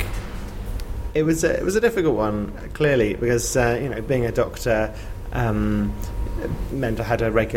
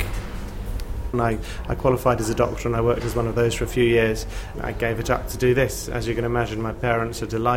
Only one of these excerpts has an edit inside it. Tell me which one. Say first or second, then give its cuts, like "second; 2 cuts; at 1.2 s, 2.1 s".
second; 2 cuts; at 1.1 s, 4.5 s